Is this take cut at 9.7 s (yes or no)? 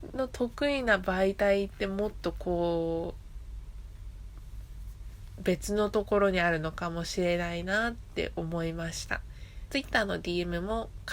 yes